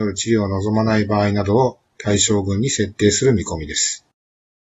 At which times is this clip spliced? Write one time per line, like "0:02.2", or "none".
none